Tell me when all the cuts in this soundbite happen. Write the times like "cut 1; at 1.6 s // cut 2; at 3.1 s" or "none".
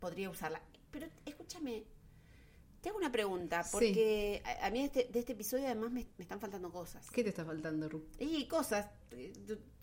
none